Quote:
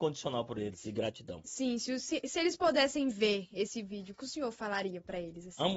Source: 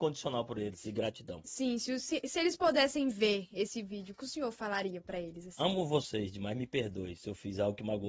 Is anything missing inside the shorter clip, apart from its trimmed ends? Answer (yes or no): no